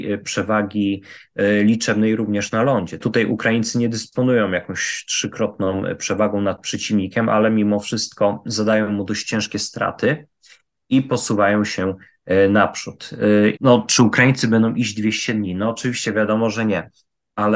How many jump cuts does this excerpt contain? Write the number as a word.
two